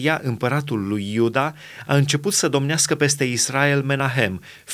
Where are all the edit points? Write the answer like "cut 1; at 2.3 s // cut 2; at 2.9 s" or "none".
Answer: none